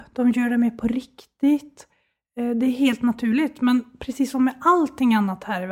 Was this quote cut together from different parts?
no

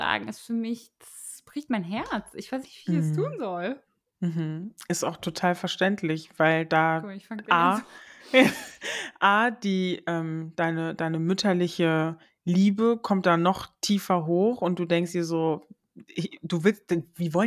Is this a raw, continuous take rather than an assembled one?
yes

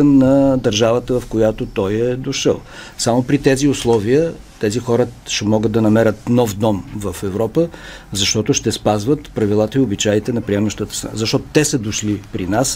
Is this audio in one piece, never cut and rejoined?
yes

